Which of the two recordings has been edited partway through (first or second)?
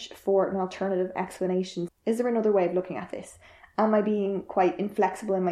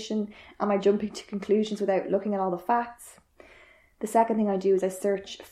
first